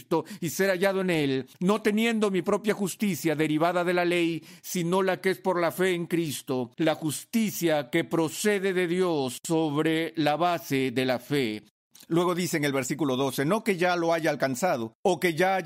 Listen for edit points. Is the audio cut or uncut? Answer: uncut